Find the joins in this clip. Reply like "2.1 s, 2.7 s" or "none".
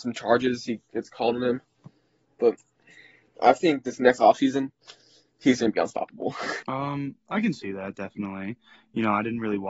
none